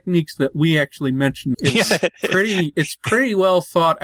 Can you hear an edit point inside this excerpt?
yes; 1 cut; at 1.5 s

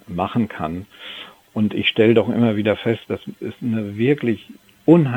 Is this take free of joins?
yes; 0 cuts

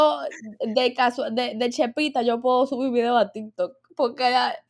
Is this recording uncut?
yes; 0 cuts

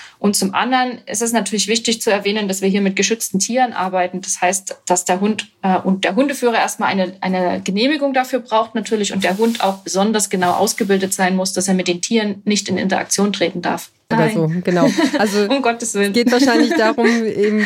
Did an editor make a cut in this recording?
yes; 1 cut; at 14.1 s

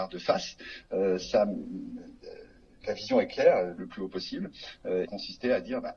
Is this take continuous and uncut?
no; 2 cuts; at 3.8 s, 5.0 s

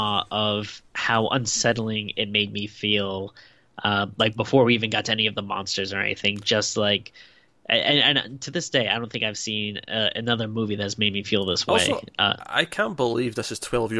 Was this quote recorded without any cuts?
yes; 0 cuts

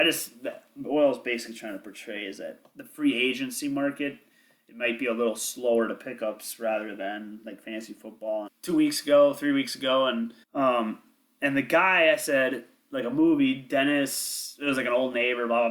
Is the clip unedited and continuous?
no; 2 cuts; at 8.5 s, 10.4 s

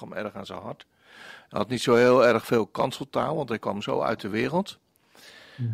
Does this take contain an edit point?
no; 0 cuts

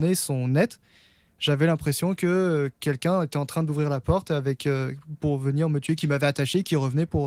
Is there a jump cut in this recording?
no; 0 cuts

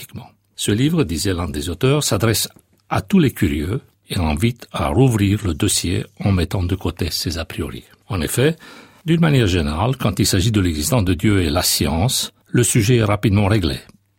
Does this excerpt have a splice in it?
no; 0 cuts

